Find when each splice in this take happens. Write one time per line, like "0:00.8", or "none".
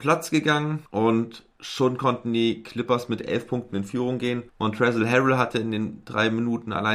0:04.5